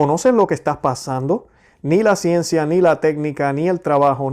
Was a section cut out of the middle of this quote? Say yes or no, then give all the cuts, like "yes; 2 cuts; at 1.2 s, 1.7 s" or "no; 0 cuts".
no; 0 cuts